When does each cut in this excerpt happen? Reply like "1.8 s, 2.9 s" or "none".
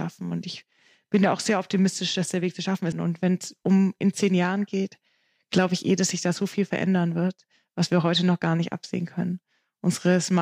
2.9 s